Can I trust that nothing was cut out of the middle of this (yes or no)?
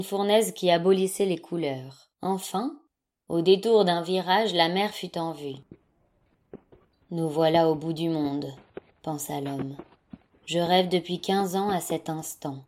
no